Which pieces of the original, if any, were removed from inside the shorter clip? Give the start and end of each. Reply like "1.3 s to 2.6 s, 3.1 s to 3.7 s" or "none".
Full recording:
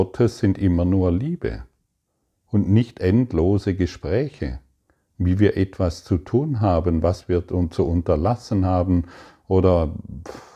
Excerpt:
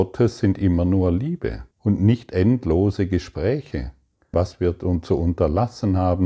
1.7 s to 2.4 s, 5.0 s to 7.0 s